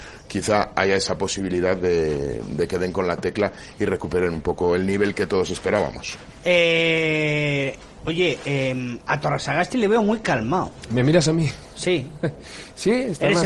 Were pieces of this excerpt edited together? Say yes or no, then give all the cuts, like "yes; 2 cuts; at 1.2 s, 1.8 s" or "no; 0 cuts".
no; 0 cuts